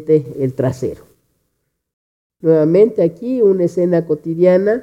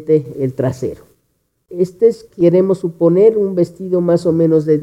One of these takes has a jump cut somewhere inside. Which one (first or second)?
second